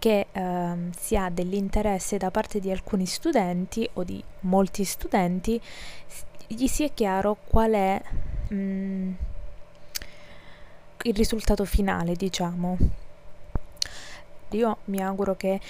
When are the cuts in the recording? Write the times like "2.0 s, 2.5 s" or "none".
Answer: 8.5 s, 11.0 s, 14.5 s